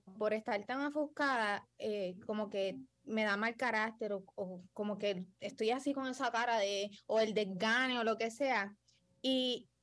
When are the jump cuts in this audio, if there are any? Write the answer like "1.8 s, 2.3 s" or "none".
none